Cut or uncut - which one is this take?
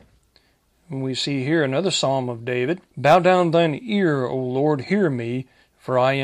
cut